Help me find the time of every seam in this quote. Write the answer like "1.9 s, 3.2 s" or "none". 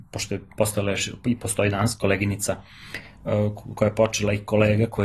none